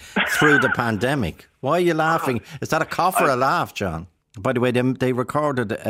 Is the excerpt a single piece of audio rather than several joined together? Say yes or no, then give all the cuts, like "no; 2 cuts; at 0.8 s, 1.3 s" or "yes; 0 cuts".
no; 1 cut; at 4.2 s